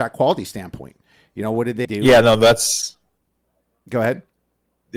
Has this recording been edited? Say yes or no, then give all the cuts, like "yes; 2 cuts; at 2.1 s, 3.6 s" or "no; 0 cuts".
yes; 1 cut; at 1.8 s